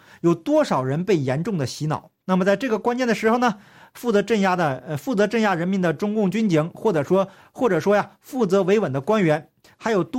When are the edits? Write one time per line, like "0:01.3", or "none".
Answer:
0:02.2